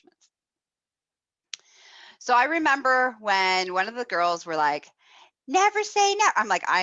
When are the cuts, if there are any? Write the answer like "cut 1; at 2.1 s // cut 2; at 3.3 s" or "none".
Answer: none